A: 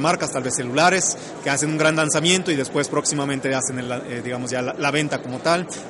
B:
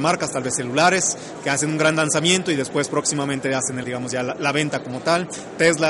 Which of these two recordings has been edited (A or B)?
B